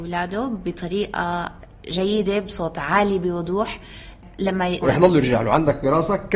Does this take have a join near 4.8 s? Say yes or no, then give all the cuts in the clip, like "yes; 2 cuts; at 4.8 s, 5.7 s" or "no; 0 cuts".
yes; 1 cut; at 4.8 s